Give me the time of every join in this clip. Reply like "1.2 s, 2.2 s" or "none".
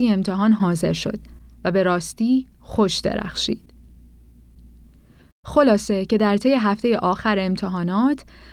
5.3 s